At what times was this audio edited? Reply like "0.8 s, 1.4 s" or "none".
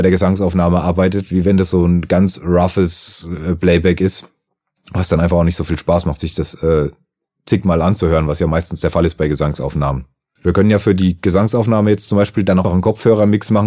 10.4 s, 12.6 s